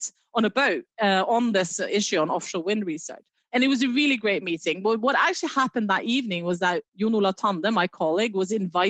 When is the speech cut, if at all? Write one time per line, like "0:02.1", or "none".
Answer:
0:03.4